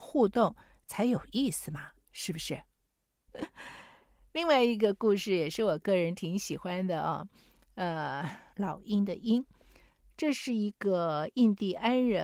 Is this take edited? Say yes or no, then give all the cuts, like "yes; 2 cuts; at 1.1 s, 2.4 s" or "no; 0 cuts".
yes; 2 cuts; at 3.3 s, 8.5 s